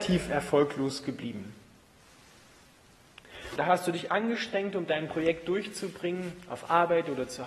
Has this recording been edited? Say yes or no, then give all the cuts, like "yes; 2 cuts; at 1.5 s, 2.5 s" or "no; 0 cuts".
yes; 1 cut; at 3.6 s